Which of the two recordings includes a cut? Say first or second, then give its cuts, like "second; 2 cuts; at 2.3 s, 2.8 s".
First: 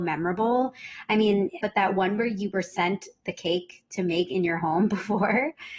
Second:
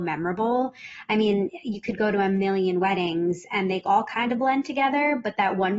first; 1 cut; at 1.6 s